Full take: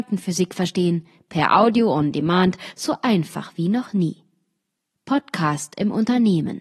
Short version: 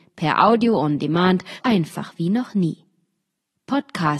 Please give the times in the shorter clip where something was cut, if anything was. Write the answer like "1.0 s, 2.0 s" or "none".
1.6 s